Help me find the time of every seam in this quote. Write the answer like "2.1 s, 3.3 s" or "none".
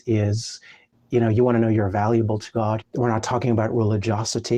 2.8 s